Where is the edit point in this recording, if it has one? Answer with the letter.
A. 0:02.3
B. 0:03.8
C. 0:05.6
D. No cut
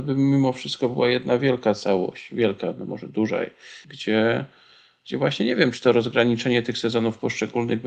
B